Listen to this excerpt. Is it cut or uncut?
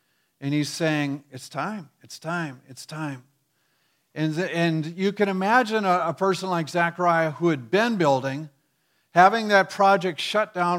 uncut